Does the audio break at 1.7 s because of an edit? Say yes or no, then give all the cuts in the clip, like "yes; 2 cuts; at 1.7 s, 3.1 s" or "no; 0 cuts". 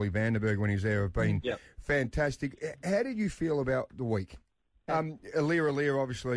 no; 1 cut; at 4.9 s